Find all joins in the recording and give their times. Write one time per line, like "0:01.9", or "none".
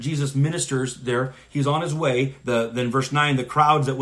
0:02.4